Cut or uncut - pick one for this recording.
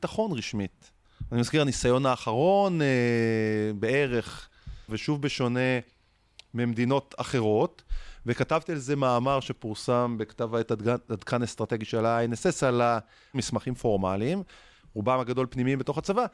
cut